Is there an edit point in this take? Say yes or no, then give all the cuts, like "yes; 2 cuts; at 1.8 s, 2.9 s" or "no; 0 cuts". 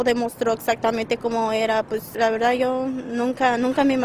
yes; 1 cut; at 2.1 s